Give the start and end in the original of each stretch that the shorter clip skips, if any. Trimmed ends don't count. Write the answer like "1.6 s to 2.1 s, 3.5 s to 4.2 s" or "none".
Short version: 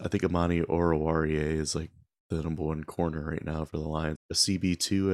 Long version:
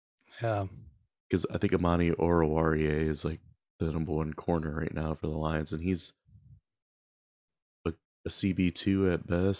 5.7 s to 8.1 s